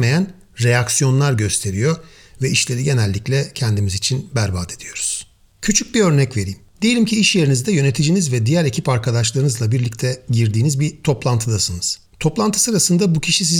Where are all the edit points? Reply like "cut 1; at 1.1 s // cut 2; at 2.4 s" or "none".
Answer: cut 1; at 12.1 s